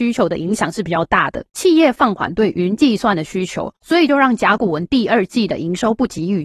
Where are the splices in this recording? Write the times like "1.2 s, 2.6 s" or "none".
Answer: none